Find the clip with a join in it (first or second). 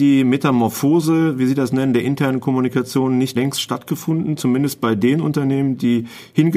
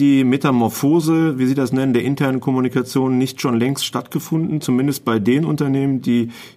first